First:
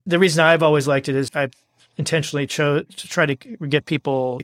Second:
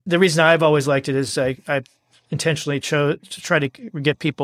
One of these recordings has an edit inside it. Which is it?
first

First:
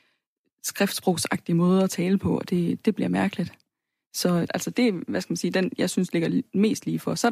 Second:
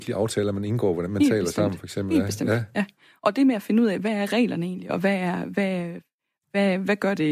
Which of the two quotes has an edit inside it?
first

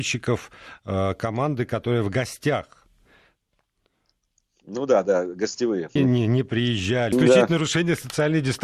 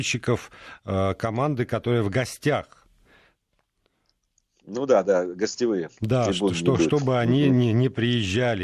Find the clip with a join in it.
first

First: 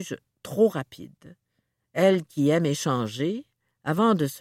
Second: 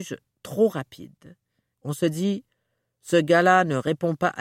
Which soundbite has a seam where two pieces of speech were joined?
second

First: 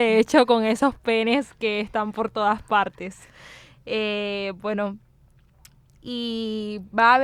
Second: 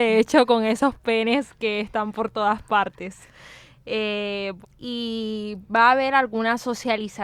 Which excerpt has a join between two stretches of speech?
second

